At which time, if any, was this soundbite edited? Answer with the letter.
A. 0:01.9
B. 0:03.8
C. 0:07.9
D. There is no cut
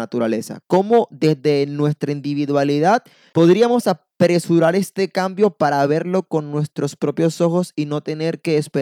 D